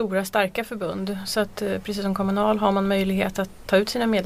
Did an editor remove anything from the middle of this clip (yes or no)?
no